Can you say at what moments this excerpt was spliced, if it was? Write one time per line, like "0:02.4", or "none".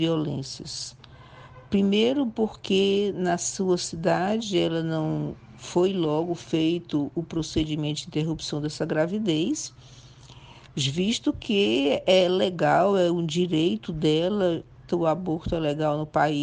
0:14.9

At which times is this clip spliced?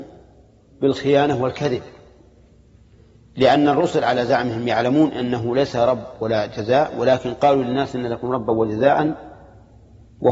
none

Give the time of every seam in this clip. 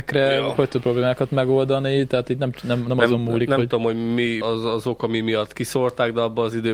0:04.4

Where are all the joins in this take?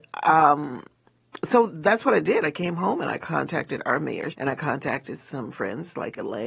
0:04.3

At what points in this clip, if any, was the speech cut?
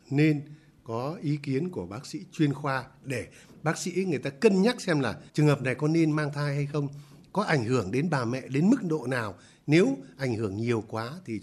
0:05.3

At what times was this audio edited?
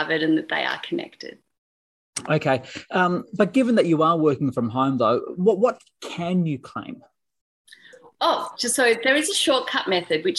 none

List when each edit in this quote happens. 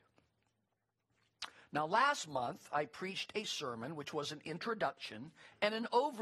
none

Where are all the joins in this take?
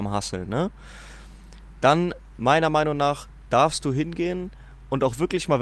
none

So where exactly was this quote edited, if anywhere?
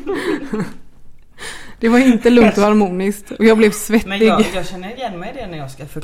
none

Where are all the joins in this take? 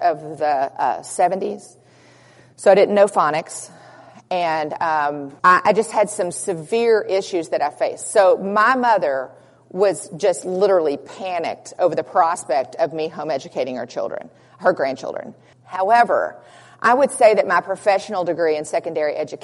0:05.4
0:15.5

